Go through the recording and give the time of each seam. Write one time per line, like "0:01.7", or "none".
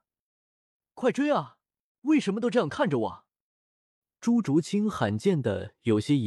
0:01.9